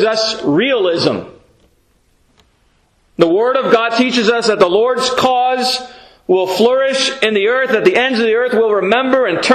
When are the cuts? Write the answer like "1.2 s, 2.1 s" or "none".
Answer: none

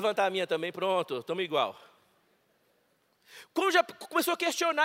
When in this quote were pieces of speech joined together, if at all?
none

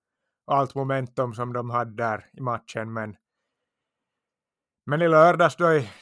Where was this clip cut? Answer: none

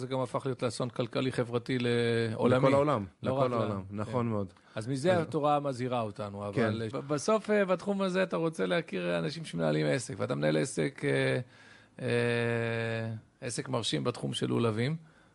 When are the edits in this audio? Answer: 6.9 s

